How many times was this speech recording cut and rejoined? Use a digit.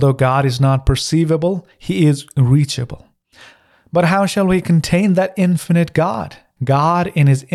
1